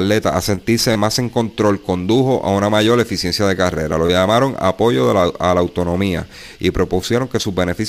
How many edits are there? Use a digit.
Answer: 0